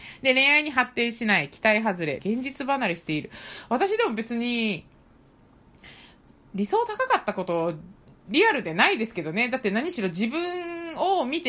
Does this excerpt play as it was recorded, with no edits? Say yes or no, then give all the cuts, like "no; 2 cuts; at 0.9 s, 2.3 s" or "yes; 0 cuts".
no; 1 cut; at 2.2 s